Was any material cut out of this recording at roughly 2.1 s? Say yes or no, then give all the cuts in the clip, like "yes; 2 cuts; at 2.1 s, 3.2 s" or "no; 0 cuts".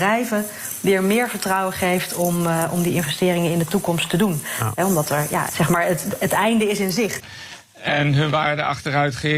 no; 2 cuts; at 5.5 s, 7.2 s